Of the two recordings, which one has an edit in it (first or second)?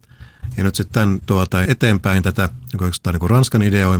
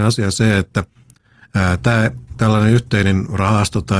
first